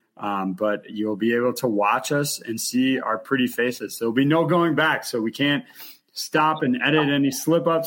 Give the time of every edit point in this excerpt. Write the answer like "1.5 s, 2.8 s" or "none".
none